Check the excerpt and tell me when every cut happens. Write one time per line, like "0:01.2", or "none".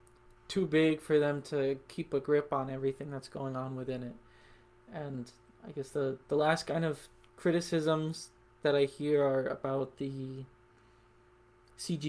none